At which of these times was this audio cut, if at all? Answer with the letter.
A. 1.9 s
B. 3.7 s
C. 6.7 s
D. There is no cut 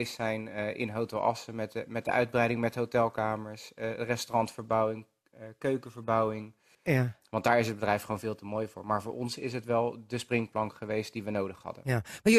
C